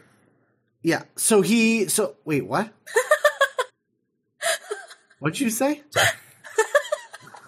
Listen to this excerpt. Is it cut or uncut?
cut